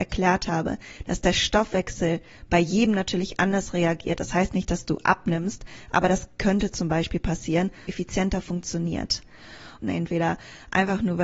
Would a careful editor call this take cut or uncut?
cut